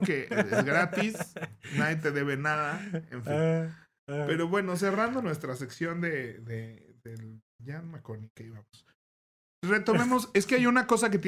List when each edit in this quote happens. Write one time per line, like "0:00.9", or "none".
none